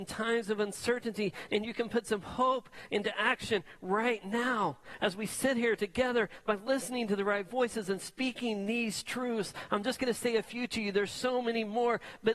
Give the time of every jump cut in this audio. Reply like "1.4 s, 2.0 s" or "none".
5.0 s